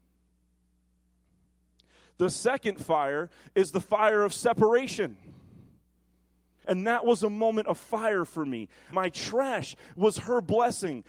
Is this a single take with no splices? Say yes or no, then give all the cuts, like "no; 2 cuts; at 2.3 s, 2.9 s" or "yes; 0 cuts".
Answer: no; 2 cuts; at 6.6 s, 8.9 s